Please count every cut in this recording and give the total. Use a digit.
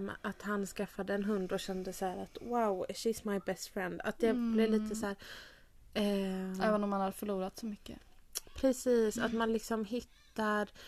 0